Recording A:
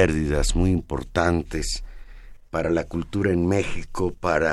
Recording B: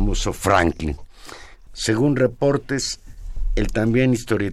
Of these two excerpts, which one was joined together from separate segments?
B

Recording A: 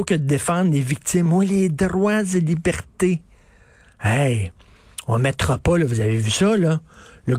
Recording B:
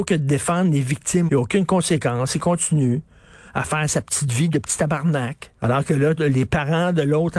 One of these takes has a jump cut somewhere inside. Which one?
B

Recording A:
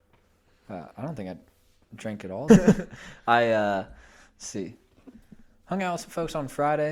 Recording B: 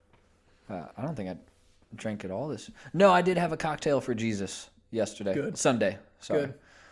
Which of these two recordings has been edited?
A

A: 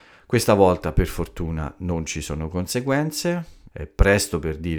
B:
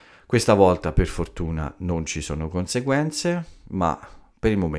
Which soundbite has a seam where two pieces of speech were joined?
A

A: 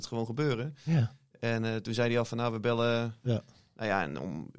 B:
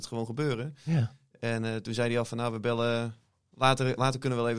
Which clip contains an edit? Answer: A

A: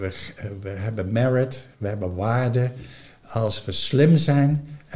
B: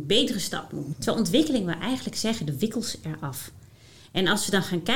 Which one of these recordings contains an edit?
B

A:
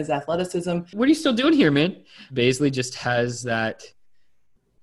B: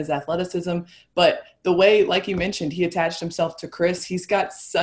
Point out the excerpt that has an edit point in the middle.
A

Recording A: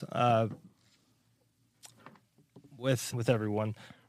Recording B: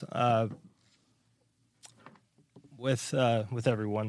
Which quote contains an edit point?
A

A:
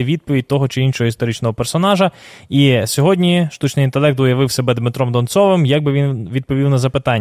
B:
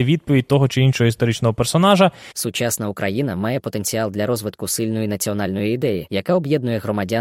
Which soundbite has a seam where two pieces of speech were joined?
B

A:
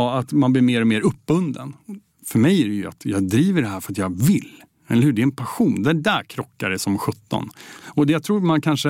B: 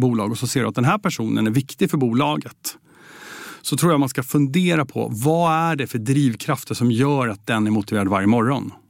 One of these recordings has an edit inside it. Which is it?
A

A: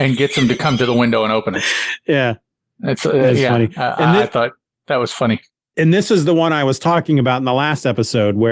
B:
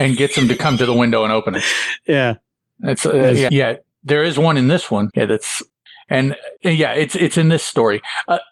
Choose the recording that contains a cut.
B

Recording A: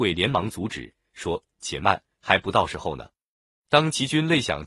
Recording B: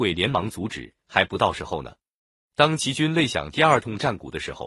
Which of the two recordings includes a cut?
B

